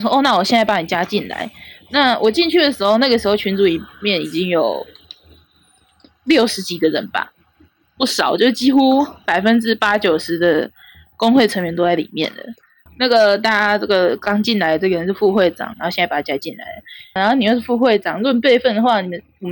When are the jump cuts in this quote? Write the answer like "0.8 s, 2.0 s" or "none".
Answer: 12.9 s, 15.7 s, 17.2 s